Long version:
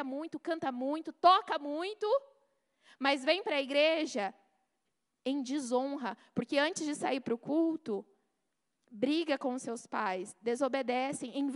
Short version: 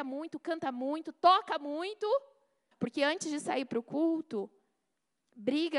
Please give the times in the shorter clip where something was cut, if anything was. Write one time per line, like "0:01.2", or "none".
0:02.7